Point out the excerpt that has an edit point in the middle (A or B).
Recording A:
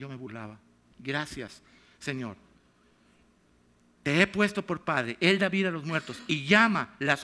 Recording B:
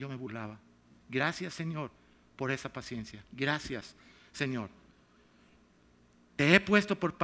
A